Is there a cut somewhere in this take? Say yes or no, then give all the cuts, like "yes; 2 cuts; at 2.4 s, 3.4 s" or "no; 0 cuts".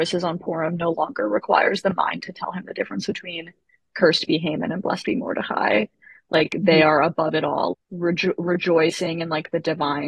yes; 1 cut; at 7.7 s